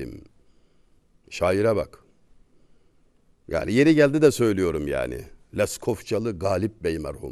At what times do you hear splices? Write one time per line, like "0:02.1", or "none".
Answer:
none